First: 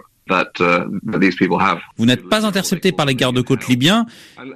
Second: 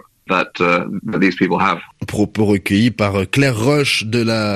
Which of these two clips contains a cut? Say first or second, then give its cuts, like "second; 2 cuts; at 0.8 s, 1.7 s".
first; 1 cut; at 2.0 s